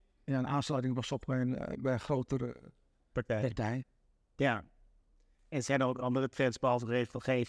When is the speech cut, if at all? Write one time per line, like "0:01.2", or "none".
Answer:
none